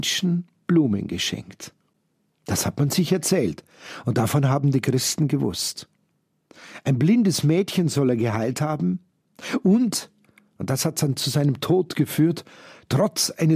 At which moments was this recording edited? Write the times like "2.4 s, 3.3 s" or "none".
none